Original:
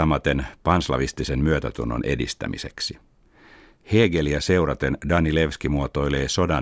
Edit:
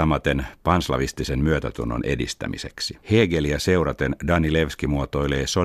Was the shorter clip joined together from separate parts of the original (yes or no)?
yes